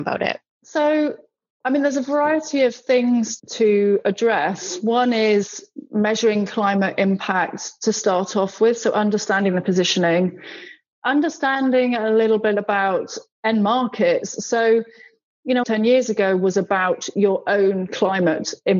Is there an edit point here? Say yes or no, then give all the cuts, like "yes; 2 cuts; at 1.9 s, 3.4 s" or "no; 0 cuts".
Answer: yes; 1 cut; at 15.6 s